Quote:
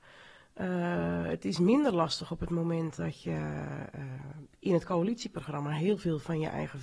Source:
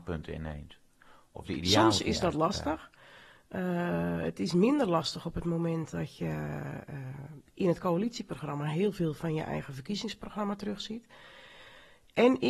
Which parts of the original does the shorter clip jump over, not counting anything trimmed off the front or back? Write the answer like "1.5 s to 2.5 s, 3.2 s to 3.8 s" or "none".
none